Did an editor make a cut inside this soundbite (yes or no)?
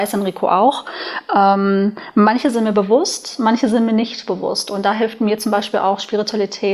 no